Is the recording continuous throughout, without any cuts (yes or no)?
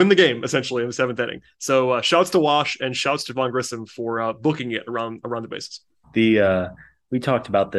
no